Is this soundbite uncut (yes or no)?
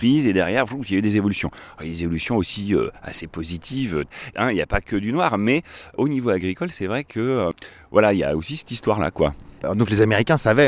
no